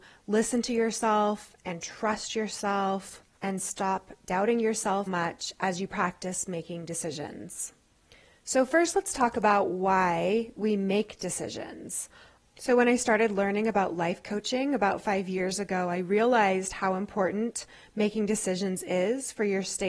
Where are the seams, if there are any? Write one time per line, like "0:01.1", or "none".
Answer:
0:05.1
0:12.4